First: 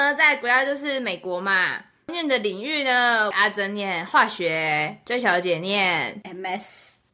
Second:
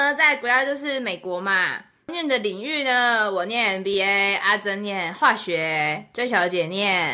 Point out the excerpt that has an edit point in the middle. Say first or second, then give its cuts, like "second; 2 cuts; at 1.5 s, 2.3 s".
first; 1 cut; at 3.3 s